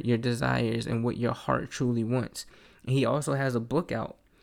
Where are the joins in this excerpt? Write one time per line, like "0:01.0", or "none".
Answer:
0:02.7